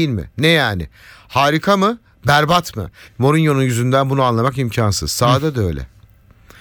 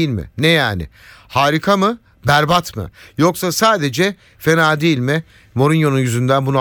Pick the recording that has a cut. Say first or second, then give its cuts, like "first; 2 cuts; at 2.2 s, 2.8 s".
first; 1 cut; at 3.1 s